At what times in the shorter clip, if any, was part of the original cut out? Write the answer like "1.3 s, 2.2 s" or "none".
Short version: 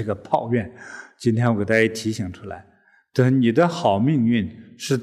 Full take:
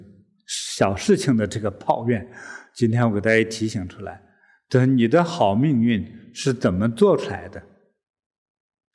none